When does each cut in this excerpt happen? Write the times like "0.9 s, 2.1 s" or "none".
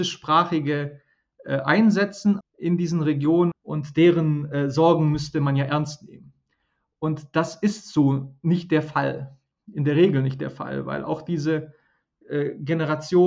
2.4 s, 3.5 s